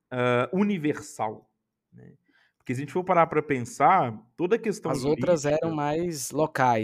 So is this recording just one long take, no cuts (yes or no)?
yes